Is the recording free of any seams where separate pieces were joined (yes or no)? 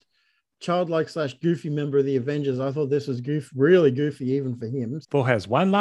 yes